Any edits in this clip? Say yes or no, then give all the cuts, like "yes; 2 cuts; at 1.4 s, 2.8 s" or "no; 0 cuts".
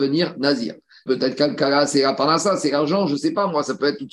yes; 1 cut; at 1.1 s